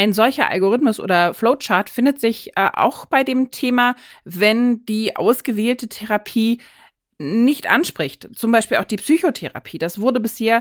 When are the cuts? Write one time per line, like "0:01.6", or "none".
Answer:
0:04.1